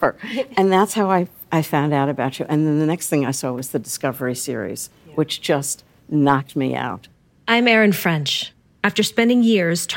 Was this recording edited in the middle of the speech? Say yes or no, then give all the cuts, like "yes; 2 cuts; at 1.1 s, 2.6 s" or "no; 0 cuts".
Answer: no; 0 cuts